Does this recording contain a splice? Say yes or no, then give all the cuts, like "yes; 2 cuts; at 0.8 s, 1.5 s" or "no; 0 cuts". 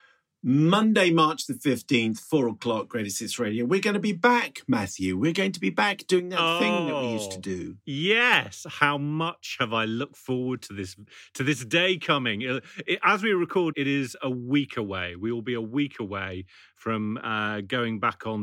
yes; 2 cuts; at 7.8 s, 13.7 s